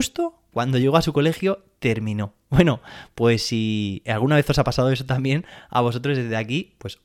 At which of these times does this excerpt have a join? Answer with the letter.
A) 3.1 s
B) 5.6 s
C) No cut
C